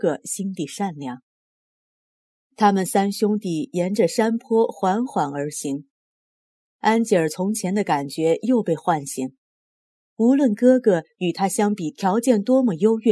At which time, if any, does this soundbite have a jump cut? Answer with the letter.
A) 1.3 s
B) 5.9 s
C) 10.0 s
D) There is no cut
D